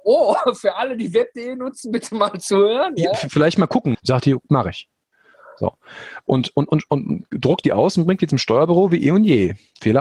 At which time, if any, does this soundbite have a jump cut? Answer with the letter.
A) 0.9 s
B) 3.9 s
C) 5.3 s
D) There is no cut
B